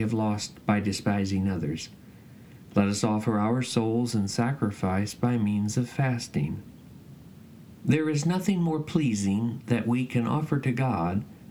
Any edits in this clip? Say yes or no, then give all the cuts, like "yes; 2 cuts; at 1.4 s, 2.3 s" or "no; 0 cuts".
no; 0 cuts